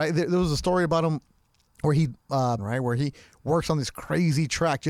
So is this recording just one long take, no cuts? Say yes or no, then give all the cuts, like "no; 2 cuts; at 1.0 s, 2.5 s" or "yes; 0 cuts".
no; 1 cut; at 2.6 s